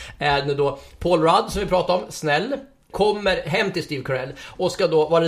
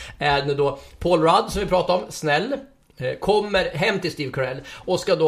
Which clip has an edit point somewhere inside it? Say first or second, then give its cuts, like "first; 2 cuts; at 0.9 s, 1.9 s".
first; 1 cut; at 2.9 s